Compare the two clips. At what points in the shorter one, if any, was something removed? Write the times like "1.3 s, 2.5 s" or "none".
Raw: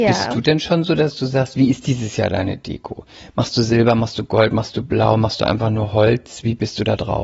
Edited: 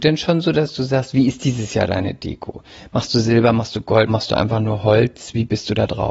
4.1 s

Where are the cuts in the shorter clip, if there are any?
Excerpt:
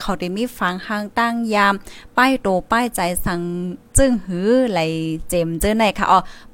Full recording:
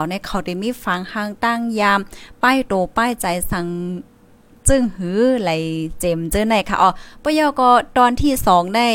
3.9 s

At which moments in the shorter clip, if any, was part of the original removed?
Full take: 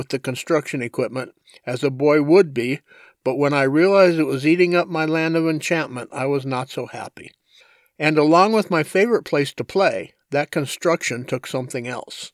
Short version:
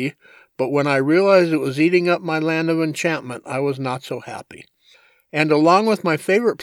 none

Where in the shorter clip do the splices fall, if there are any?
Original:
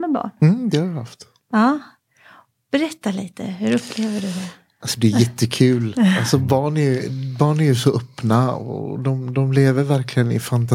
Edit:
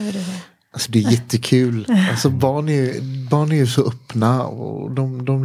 none

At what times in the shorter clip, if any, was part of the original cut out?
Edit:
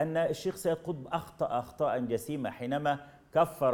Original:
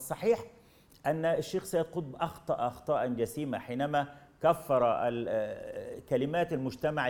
none

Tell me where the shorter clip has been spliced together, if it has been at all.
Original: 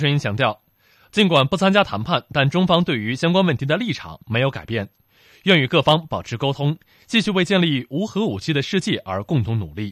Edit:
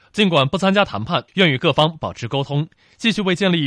1.3 s

